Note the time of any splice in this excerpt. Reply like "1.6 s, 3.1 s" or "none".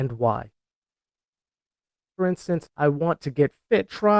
2.7 s